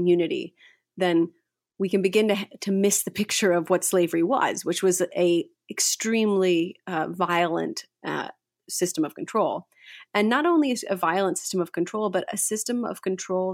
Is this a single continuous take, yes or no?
yes